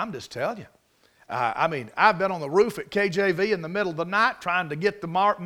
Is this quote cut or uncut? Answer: uncut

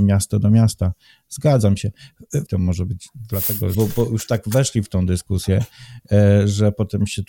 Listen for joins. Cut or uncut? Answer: cut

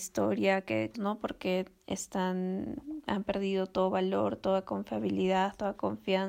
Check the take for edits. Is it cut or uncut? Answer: cut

